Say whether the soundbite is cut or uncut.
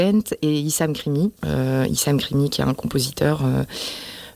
cut